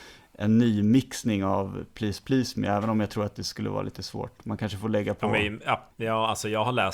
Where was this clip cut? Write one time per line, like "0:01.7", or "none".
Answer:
0:05.9